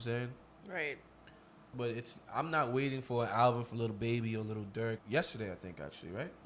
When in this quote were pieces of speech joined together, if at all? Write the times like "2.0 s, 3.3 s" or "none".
1.7 s, 5.0 s